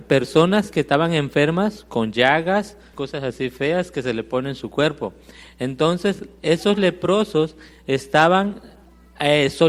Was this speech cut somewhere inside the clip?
yes; 1 cut; at 2.9 s

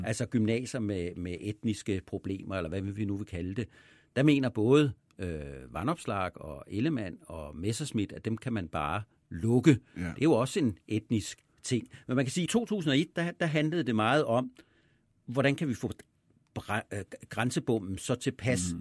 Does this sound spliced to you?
no; 0 cuts

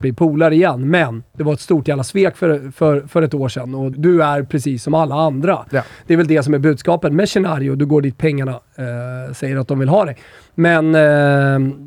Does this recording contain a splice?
yes; 1 cut; at 3.9 s

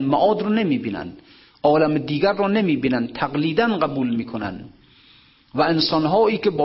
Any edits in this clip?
no; 0 cuts

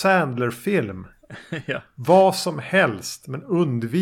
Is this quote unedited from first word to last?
yes; 0 cuts

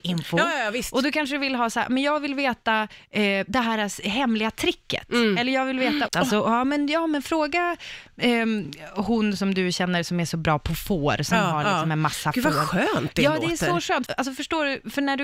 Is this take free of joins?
no; 2 cuts; at 6.1 s, 14.1 s

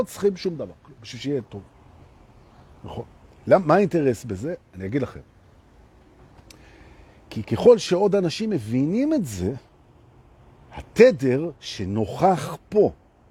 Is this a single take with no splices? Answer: yes; 0 cuts

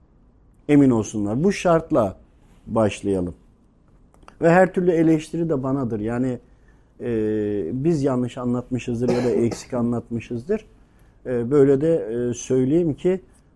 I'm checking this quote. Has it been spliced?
no; 0 cuts

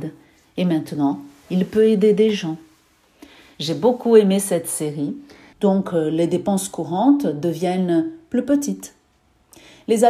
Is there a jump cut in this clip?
yes; 2 cuts; at 3.5 s, 5.5 s

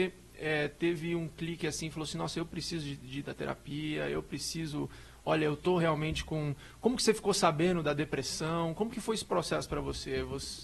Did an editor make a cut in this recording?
no; 0 cuts

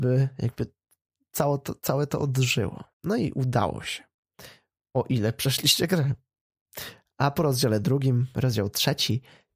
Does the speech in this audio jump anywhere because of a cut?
yes; 1 cut; at 2.9 s

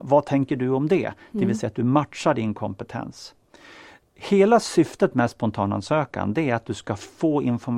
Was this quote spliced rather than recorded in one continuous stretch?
no; 0 cuts

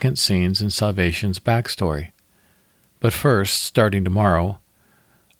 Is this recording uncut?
yes; 0 cuts

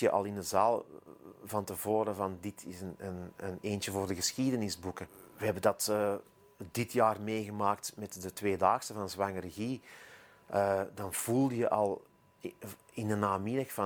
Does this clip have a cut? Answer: no; 0 cuts

